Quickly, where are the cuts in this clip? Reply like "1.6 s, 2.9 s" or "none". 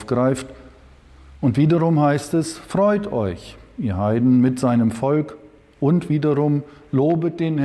none